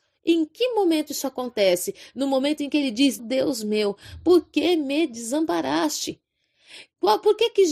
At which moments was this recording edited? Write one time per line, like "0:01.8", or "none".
0:03.2